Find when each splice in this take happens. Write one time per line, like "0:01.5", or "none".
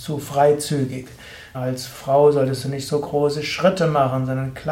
0:01.5